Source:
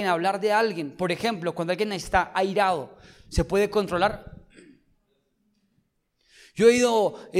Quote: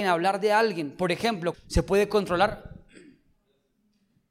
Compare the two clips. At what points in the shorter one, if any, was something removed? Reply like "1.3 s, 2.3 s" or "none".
1.5 s